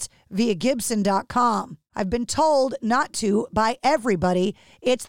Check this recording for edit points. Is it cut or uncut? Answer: cut